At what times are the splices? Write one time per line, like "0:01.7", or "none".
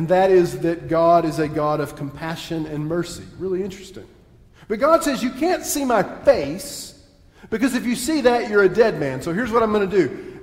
none

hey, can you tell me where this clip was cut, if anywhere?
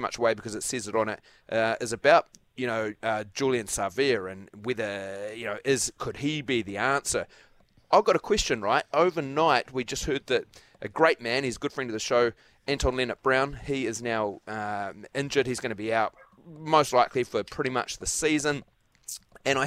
none

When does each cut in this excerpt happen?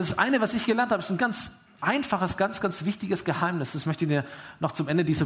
0:01.2

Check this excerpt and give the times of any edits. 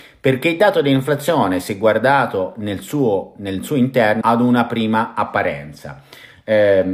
0:04.2

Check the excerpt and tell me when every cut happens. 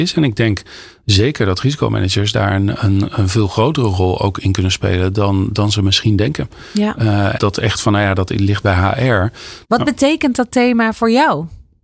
0:07.4
0:09.6

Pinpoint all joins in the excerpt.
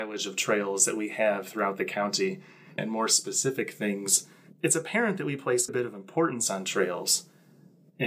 0:02.8
0:05.7

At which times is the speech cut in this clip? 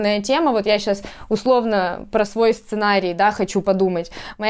none

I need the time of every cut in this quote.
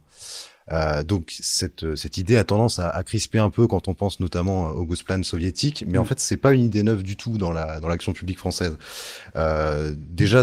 none

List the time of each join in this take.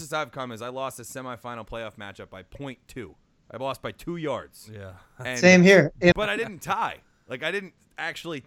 0:06.1

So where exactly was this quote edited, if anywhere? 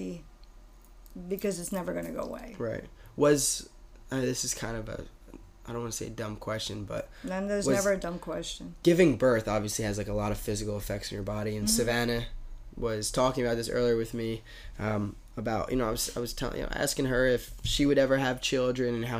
0:08.8

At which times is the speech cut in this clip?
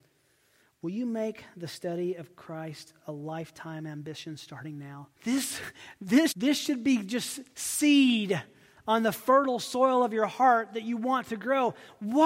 0:05.1
0:06.3

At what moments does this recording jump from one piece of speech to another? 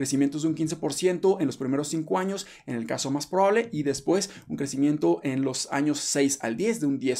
none

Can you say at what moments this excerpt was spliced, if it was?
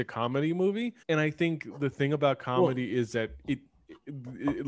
0:01.0

